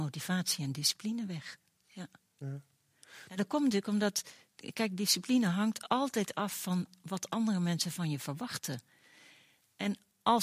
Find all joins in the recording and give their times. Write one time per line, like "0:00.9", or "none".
none